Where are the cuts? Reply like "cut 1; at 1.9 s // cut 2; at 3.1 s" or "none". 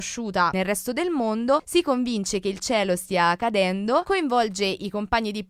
cut 1; at 1.6 s